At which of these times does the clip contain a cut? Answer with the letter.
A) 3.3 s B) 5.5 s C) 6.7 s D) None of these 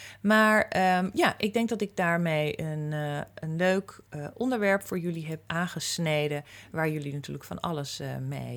B